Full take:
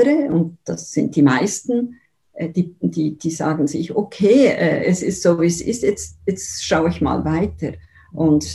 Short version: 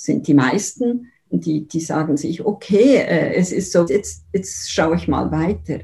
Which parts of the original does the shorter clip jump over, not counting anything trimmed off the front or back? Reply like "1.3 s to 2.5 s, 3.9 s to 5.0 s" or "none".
2.1 s to 2.8 s, 5.4 s to 5.8 s

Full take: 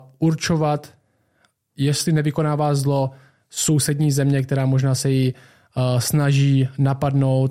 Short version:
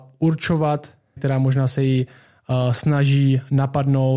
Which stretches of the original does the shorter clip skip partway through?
1.2 s to 4.4 s

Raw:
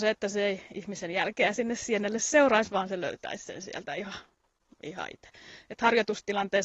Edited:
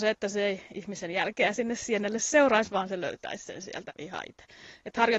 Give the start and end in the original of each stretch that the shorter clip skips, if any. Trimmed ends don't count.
3.9 s to 4.7 s

